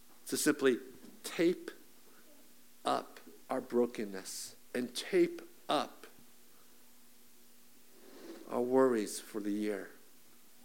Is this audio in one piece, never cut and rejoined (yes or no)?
no